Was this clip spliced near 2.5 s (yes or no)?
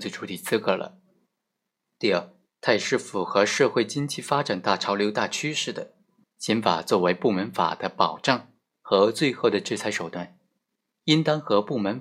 yes